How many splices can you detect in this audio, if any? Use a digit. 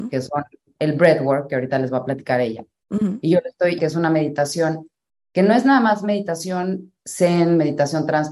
1